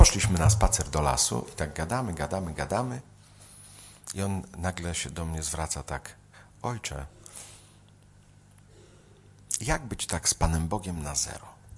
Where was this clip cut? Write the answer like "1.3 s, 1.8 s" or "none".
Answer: none